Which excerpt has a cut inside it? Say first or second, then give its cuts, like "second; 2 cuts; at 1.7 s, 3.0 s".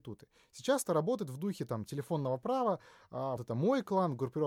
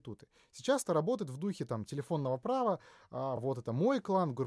first; 1 cut; at 3.4 s